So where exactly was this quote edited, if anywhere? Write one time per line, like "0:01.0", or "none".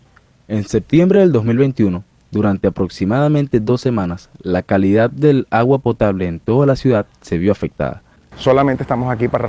0:08.3